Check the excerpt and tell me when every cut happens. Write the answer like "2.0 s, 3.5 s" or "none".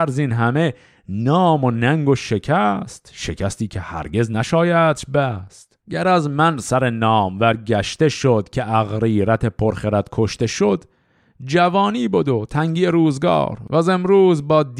5.8 s